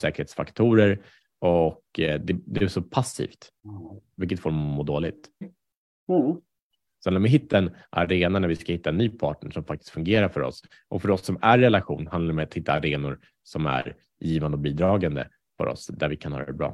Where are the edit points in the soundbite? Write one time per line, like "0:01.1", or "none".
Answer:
0:05.4
0:06.9